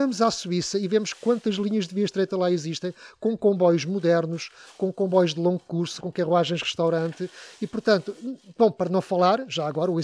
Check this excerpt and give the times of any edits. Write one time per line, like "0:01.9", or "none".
0:06.0

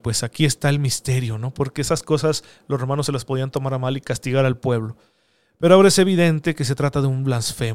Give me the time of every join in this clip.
0:01.5

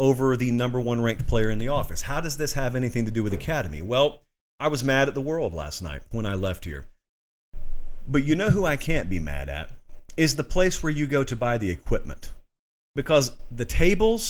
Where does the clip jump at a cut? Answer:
none

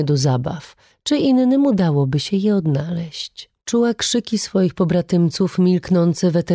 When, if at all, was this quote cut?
0:00.9
0:03.6

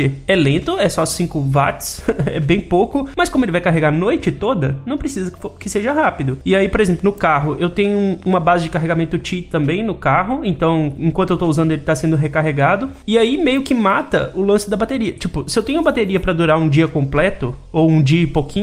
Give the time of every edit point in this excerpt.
none

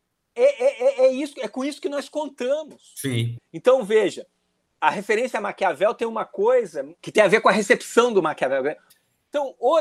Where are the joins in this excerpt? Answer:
0:03.4
0:07.0
0:08.9

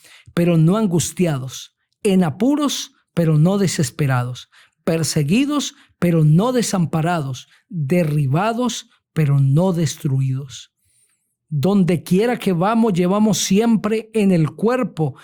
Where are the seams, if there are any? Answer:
none

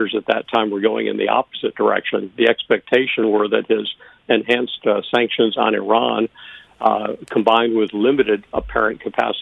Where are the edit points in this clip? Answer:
none

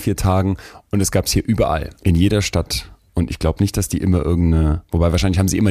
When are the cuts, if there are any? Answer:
0:02.0

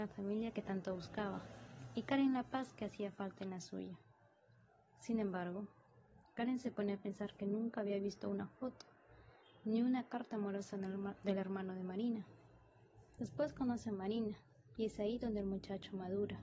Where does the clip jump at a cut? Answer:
0:13.2
0:14.8

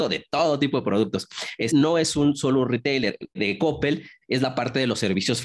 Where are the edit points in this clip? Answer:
0:01.7
0:03.4

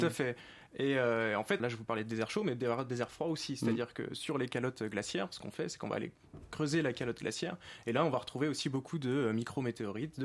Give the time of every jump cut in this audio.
0:01.6

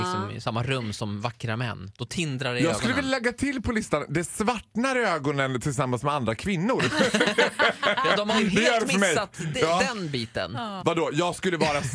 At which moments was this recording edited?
0:10.8

